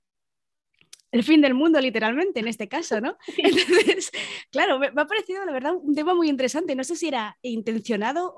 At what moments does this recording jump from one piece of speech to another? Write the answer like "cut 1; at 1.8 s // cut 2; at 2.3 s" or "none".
none

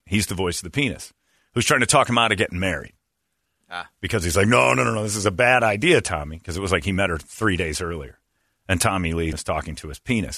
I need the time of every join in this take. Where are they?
cut 1; at 9.3 s

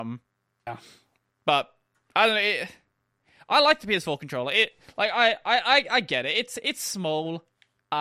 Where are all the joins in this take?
none

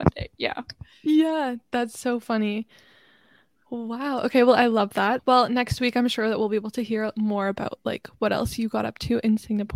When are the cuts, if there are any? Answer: cut 1; at 5.2 s

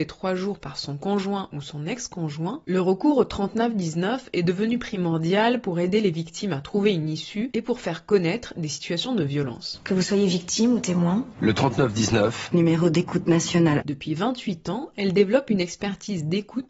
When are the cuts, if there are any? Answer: cut 1; at 13.8 s

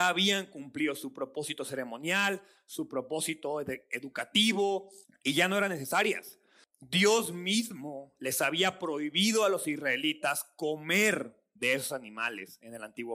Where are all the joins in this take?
cut 1; at 5.0 s // cut 2; at 6.6 s

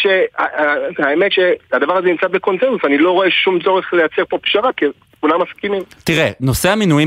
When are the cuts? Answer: none

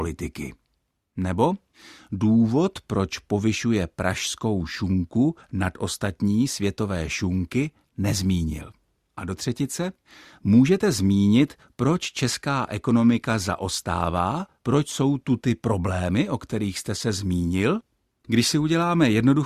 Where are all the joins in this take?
cut 1; at 18.2 s

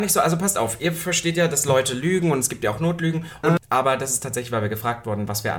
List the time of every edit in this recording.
cut 1; at 3.6 s

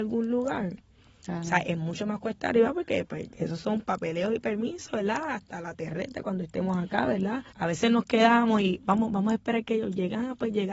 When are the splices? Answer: cut 1; at 3.3 s // cut 2; at 7.5 s

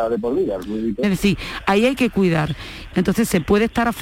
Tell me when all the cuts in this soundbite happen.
cut 1; at 1.0 s // cut 2; at 2.9 s

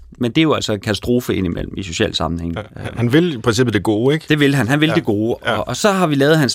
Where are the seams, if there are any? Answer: none

